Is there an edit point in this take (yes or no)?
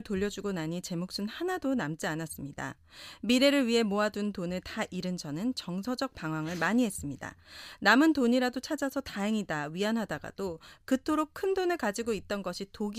no